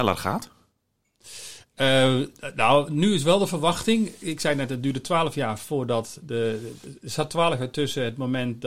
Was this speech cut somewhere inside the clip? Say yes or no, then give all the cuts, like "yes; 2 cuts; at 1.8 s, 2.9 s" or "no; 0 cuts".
no; 0 cuts